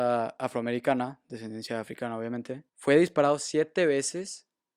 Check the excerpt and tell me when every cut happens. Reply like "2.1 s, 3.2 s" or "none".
2.7 s